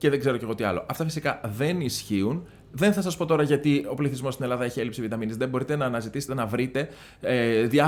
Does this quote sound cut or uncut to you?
cut